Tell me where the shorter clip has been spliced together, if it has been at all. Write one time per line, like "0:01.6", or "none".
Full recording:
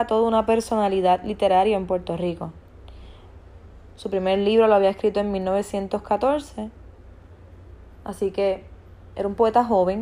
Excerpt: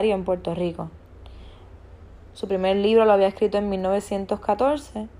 none